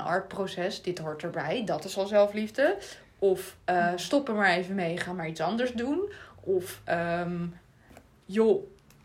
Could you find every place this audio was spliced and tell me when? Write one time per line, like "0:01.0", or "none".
none